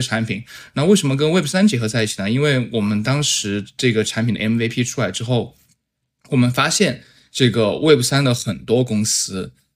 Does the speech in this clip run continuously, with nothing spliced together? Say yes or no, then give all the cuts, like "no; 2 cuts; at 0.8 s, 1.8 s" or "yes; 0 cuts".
yes; 0 cuts